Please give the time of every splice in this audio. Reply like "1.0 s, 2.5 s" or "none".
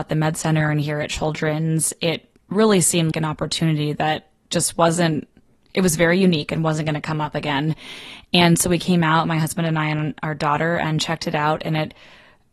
3.1 s